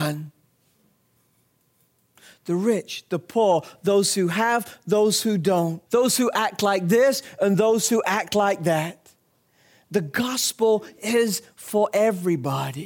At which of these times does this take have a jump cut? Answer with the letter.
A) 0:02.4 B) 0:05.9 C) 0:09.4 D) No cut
B